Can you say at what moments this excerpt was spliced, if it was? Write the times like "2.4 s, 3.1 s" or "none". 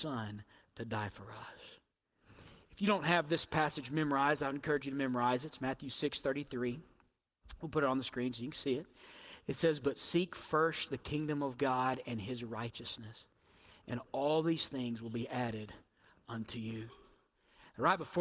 none